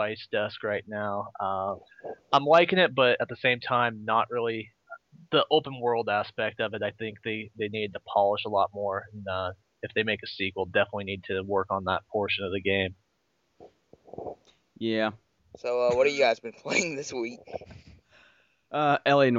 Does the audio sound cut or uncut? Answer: cut